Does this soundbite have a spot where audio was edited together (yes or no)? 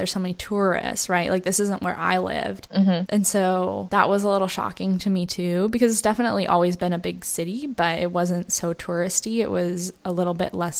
no